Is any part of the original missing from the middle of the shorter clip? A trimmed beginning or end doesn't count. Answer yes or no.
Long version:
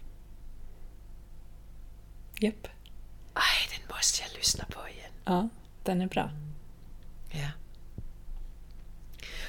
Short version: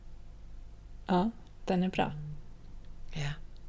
yes